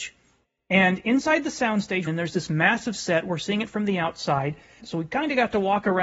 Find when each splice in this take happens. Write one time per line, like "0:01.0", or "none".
0:02.1
0:04.8